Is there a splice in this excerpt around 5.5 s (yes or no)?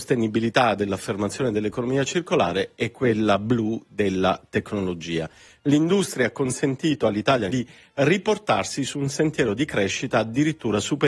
yes